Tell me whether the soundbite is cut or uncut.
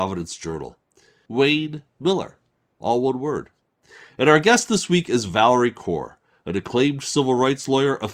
cut